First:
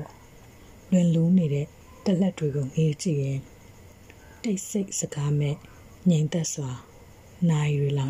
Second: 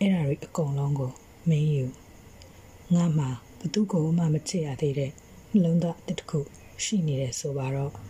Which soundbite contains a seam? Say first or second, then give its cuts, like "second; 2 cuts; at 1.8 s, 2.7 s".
second; 1 cut; at 3.5 s